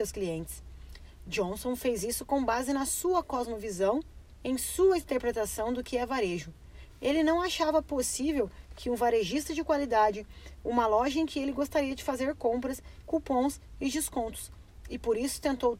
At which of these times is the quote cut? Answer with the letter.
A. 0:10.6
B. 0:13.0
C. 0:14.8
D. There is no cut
B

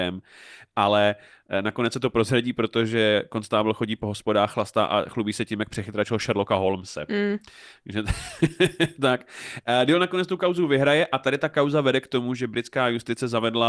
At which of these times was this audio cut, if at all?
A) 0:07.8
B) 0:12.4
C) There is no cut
C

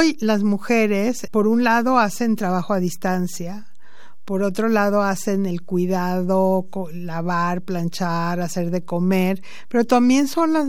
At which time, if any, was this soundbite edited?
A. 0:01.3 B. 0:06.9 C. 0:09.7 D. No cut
A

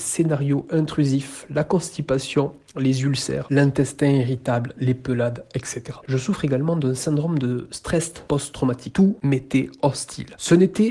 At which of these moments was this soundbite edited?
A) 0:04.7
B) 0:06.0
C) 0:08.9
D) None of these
C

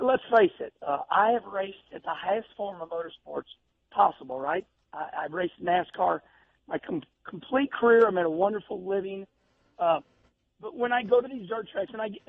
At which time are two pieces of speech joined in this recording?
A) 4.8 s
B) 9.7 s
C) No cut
C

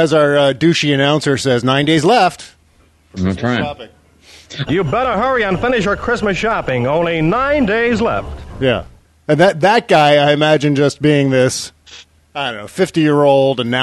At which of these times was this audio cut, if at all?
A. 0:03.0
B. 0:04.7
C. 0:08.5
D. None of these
B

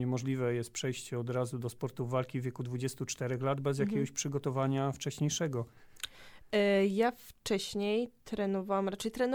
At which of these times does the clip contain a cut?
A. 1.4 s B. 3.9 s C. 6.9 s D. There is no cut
D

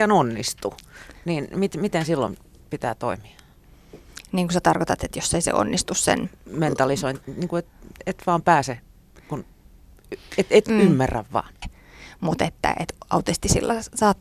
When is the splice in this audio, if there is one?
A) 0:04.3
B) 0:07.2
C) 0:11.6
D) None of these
C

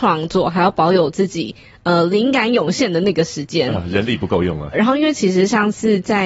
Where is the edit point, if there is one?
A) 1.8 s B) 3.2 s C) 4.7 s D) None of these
C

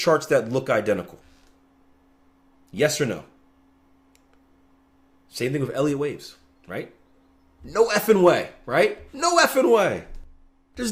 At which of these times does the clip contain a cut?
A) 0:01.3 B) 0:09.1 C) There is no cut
C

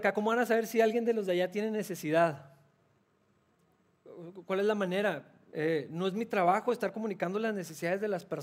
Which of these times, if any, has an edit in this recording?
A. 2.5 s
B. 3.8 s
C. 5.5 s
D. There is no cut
C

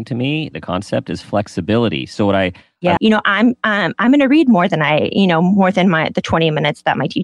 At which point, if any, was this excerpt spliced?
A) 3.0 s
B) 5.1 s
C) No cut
A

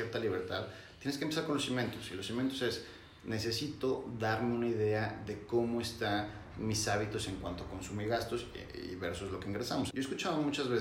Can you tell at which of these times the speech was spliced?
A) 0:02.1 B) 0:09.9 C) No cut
B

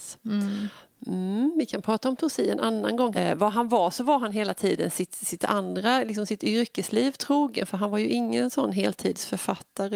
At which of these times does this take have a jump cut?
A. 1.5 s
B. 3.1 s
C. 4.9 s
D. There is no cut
B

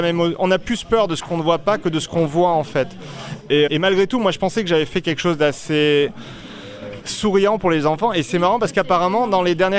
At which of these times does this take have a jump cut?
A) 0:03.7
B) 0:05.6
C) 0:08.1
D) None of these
A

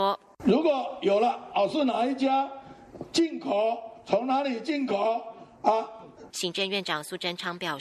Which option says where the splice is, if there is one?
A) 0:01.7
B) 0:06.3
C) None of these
B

